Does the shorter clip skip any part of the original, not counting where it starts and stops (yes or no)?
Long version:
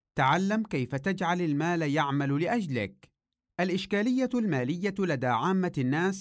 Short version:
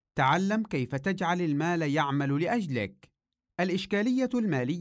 no